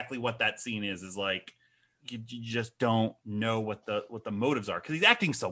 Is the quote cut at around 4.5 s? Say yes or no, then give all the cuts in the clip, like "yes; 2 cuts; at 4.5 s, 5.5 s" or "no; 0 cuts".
no; 2 cuts; at 2.0 s, 3.2 s